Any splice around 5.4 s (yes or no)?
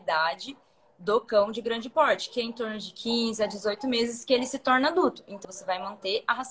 yes